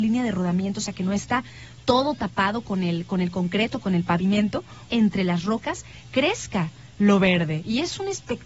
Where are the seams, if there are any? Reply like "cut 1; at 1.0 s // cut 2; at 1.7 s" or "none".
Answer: cut 1; at 4.9 s